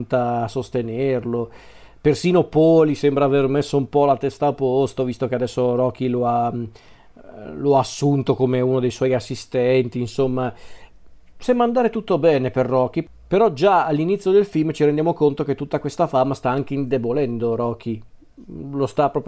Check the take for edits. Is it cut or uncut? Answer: uncut